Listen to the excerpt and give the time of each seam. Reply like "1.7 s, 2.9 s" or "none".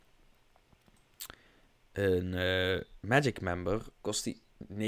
3.9 s